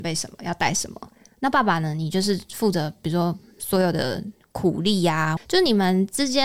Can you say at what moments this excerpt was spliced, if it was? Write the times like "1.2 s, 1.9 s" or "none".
5.4 s